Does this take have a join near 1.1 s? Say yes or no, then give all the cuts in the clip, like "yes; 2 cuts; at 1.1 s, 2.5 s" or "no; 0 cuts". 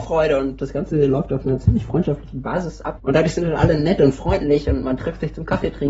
no; 1 cut; at 3.0 s